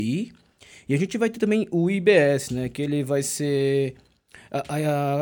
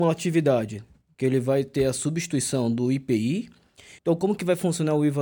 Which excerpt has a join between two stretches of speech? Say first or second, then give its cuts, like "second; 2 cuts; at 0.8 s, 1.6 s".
second; 2 cuts; at 1.1 s, 4.0 s